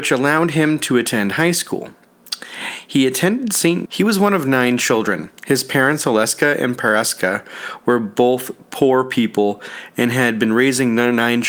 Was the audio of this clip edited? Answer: yes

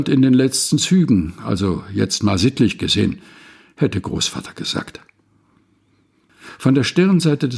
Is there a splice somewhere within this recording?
no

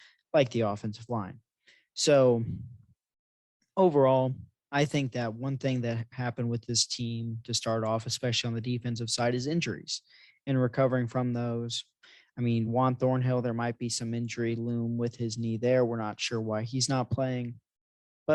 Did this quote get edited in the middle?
no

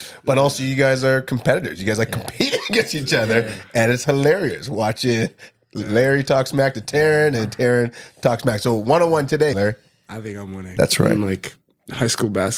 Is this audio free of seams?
no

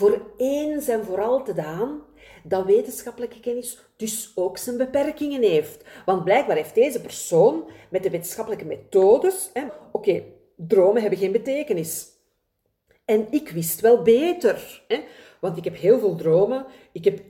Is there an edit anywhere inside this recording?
yes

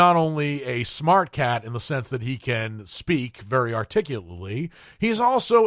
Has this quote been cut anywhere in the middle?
no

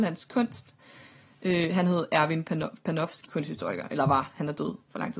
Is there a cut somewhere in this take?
yes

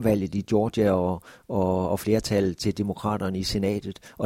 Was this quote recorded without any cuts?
yes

